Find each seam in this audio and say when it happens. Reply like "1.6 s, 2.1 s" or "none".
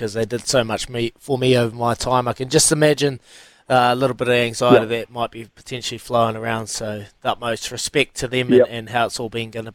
none